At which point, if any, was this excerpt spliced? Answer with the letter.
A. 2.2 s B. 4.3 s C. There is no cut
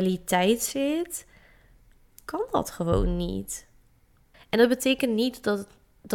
B